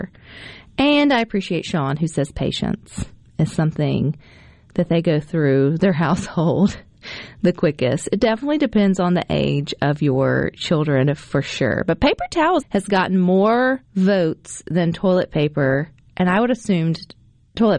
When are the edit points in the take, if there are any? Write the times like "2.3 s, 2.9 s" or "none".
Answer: 12.6 s, 13.8 s